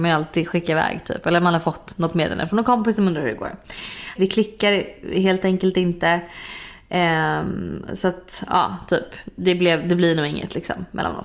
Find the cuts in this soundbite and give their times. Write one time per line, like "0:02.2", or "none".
0:04.2